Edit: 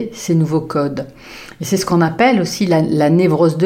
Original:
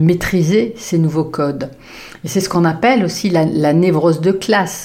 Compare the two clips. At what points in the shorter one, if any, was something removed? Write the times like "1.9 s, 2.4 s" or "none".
none

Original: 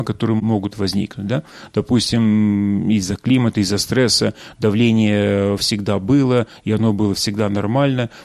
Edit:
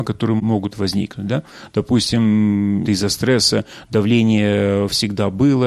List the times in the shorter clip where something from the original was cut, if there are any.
2.8 s

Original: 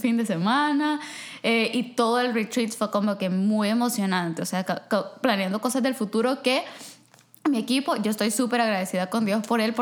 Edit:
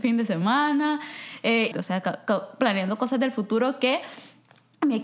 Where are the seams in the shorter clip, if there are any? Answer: 1.7 s

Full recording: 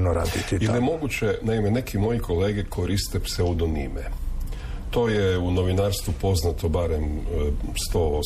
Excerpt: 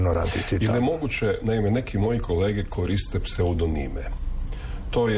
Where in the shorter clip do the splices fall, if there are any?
none

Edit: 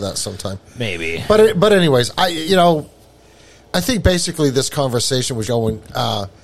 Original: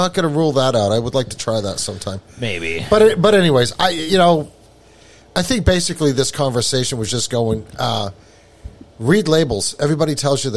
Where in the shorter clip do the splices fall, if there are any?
5.4 s

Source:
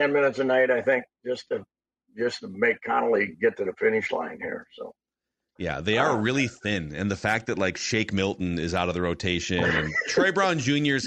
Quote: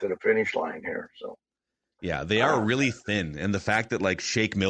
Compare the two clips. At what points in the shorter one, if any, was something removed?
none

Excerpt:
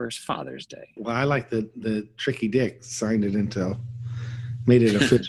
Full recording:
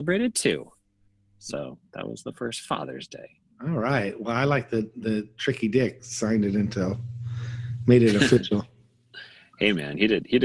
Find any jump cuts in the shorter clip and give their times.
1.0 s

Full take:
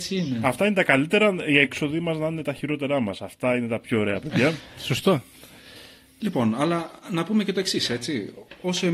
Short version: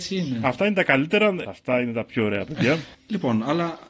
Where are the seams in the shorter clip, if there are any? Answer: 1.4 s, 2.9 s

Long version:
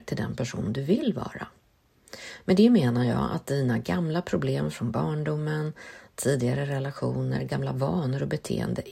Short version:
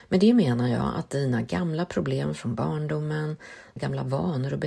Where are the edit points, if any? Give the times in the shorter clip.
3.8 s

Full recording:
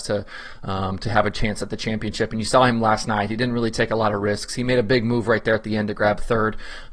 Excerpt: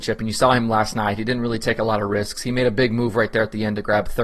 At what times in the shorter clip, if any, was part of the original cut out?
none

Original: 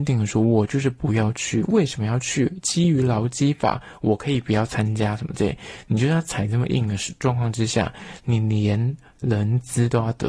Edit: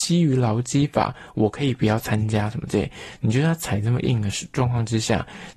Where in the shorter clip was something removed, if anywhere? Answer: none

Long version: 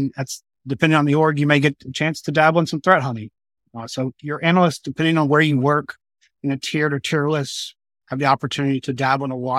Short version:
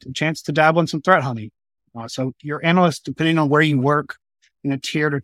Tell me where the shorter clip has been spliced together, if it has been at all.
none

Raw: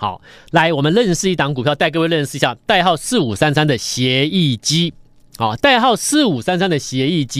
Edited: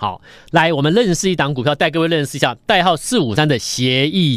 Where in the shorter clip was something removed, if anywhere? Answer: 3.4 s

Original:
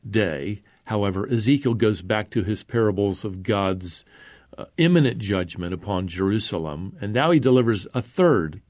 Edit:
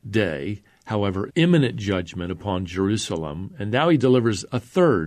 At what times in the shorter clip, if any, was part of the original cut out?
1.3 s

